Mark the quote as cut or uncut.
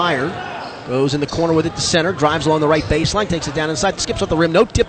cut